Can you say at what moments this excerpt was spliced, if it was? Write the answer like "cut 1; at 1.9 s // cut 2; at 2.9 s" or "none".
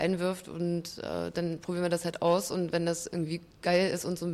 none

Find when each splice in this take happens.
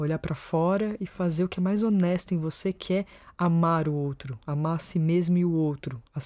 none

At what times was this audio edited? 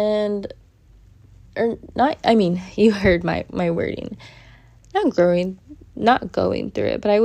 none

